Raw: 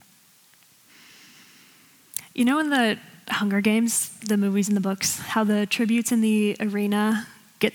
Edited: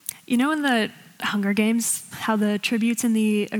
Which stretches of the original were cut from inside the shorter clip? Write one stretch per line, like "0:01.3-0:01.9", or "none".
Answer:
0:04.2-0:05.2